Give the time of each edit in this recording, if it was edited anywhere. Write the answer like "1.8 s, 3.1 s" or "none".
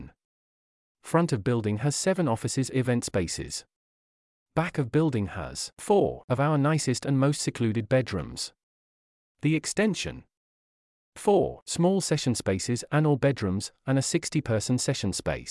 13.8 s